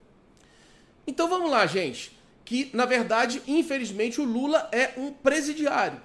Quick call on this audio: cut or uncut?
cut